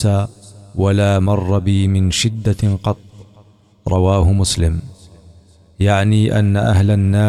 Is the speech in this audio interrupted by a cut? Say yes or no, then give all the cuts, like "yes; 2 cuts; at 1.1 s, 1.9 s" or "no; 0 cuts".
no; 0 cuts